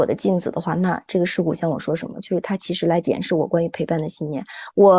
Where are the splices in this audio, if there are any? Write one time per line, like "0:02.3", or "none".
none